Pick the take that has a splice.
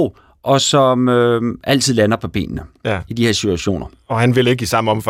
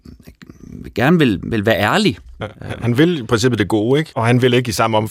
second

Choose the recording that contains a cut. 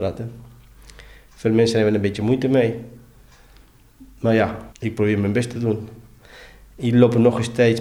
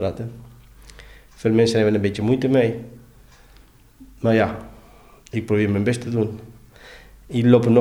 first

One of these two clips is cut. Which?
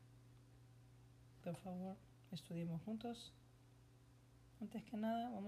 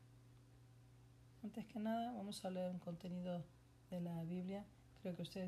second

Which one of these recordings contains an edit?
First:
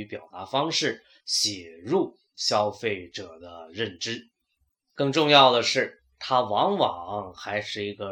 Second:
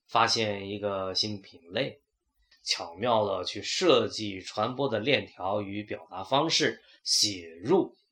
second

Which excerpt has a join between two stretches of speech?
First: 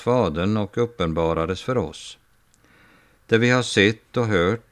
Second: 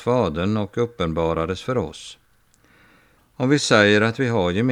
second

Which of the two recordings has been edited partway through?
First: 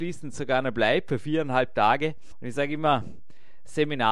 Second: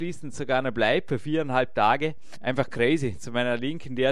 first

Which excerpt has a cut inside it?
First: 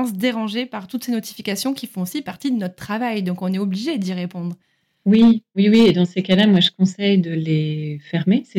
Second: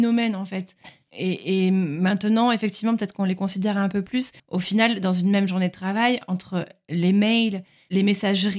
second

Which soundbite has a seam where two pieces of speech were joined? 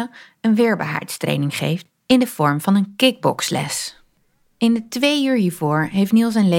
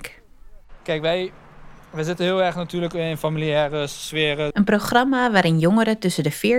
second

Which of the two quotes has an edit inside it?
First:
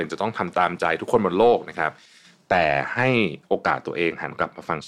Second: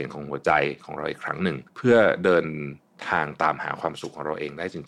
second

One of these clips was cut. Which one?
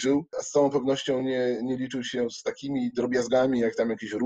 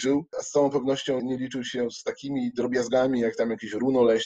second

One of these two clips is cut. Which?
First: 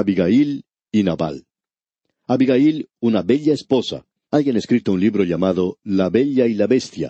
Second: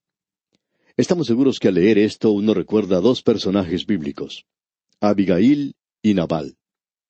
first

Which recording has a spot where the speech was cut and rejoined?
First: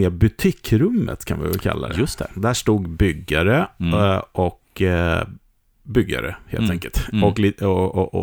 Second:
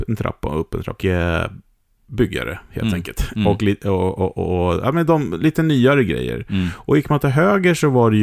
second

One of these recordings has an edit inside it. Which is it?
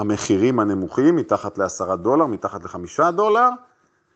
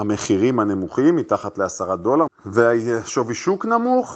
second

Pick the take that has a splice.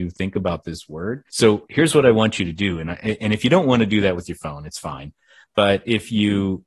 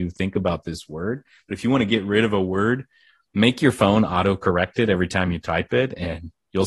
first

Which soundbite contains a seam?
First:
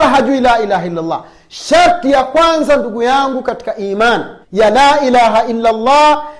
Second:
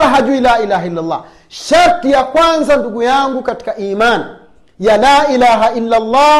first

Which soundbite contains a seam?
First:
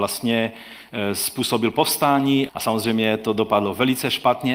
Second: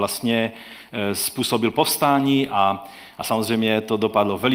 first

